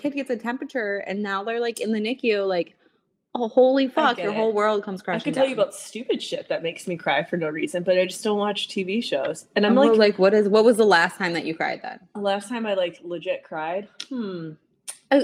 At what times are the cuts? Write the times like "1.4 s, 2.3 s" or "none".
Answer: none